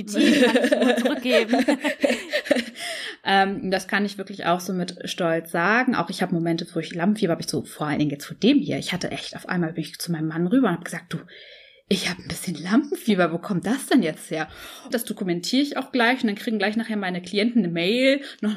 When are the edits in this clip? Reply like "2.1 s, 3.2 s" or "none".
14.9 s